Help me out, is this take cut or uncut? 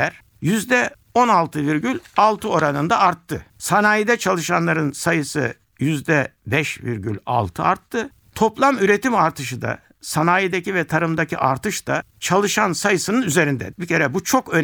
cut